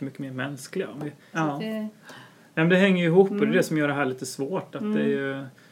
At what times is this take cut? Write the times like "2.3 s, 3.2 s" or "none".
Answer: 1.3 s